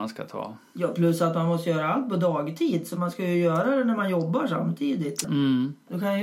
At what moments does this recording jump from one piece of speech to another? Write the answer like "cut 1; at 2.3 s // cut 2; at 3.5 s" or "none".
cut 1; at 5.2 s